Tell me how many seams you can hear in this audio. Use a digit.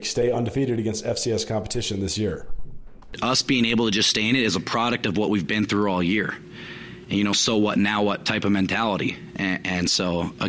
0